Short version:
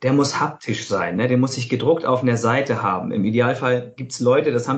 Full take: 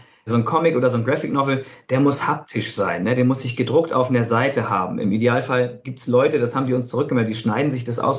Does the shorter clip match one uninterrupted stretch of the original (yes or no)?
yes